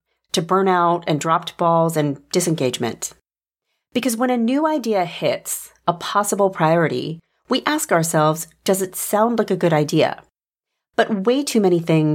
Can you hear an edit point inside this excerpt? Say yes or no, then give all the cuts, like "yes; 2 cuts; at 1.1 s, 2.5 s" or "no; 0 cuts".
no; 0 cuts